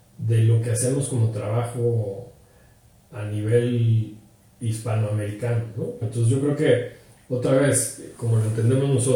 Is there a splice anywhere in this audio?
yes; 2 cuts; at 6.0 s, 8.1 s

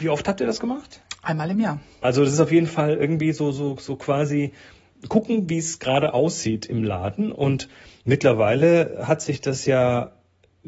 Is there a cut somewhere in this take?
yes; 1 cut; at 2.0 s

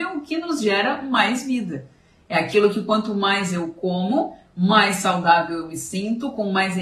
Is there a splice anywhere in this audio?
no; 0 cuts

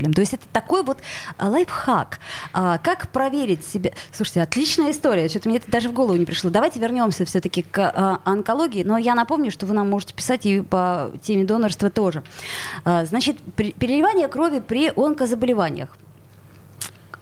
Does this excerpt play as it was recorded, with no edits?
no; 1 cut; at 8.8 s

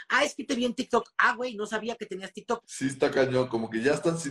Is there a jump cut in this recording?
yes; 1 cut; at 2.6 s

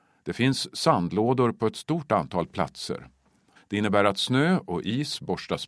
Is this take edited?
yes; 1 cut; at 3.6 s

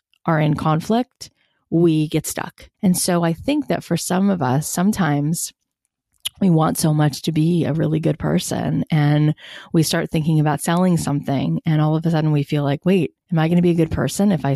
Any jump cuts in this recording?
yes; 2 cuts; at 2.7 s, 13.2 s

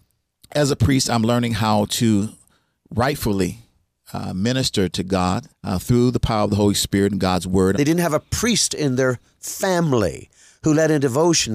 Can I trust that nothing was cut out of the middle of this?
no; 2 cuts; at 5.5 s, 7.7 s

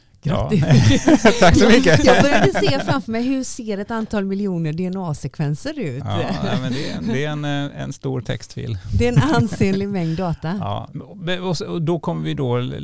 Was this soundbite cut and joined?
no; 0 cuts

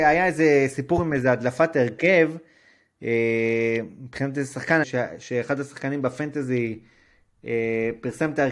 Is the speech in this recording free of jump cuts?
no; 1 cut; at 4.8 s

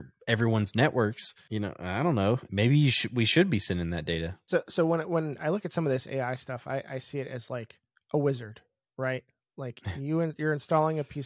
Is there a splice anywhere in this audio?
yes; 1 cut; at 2.5 s

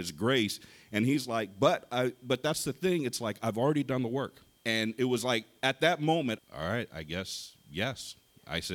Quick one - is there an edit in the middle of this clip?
yes; 2 cuts; at 4.6 s, 6.4 s

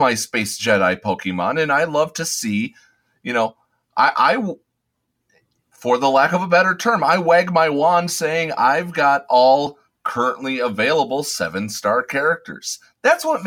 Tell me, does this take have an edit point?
no; 0 cuts

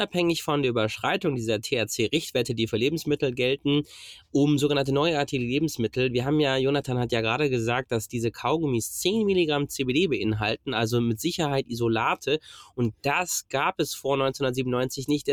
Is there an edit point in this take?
no; 0 cuts

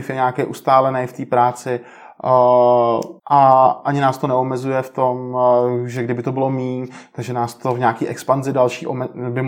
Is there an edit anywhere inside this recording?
yes; 1 cut; at 3.2 s

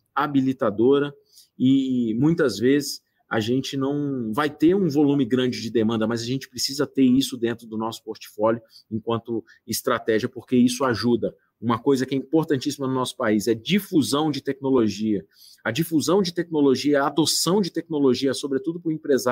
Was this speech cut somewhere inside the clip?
no; 0 cuts

